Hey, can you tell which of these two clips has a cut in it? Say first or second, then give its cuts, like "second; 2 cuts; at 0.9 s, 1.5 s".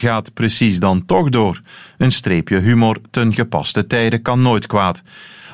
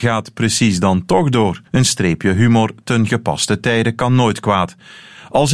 second; 1 cut; at 1.7 s